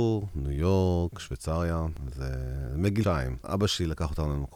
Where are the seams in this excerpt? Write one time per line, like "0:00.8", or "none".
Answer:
0:03.0